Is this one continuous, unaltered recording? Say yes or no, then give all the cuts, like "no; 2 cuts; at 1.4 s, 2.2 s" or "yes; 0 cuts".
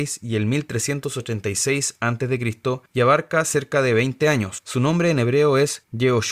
no; 1 cut; at 4.6 s